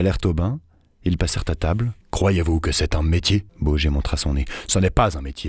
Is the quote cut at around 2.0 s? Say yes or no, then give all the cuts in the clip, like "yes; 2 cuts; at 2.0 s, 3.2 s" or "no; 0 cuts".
yes; 2 cuts; at 2.0 s, 3.5 s